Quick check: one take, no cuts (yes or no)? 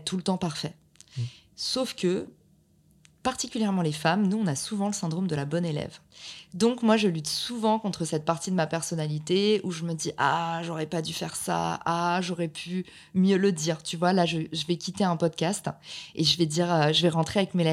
yes